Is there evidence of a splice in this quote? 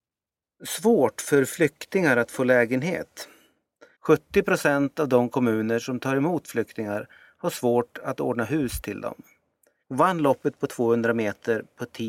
yes; 2 cuts; at 3.9 s, 9.8 s

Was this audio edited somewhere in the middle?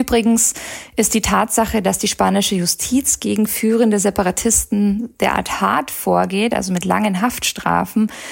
no; 0 cuts

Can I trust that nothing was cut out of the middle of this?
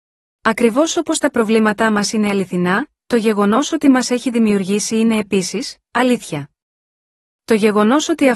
yes; 0 cuts

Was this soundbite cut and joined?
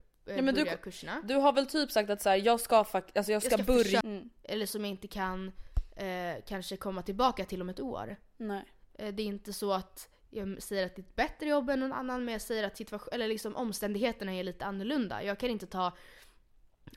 yes; 1 cut; at 4.0 s

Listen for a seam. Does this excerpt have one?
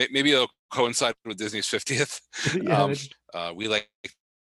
yes; 1 cut; at 3.1 s

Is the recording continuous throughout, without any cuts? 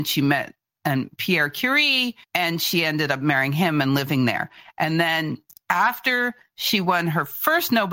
no; 1 cut; at 2.2 s

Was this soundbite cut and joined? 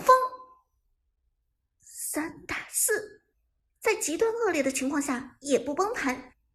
yes; 1 cut; at 1.6 s

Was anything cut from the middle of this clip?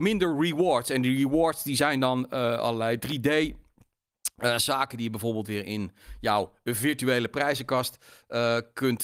no; 0 cuts

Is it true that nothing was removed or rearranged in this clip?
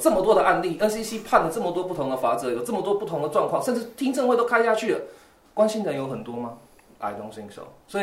yes; 0 cuts

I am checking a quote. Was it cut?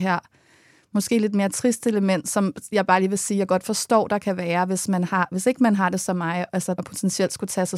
yes; 1 cut; at 6.8 s

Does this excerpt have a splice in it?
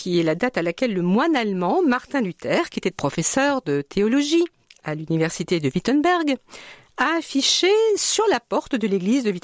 yes; 1 cut; at 2.9 s

